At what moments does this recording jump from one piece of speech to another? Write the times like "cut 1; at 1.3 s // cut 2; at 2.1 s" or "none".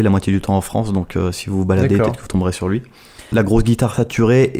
cut 1; at 3.3 s

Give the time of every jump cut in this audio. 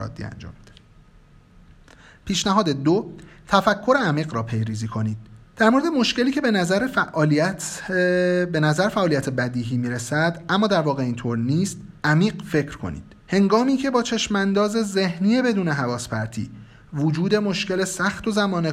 cut 1; at 5.5 s // cut 2; at 12.0 s // cut 3; at 13.2 s

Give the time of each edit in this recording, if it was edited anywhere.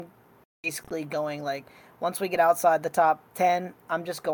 none

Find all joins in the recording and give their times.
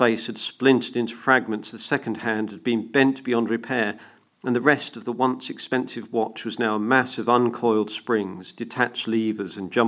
none

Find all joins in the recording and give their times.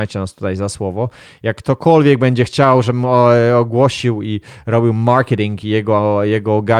none

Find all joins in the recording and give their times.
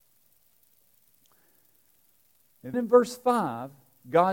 cut 1; at 2.7 s

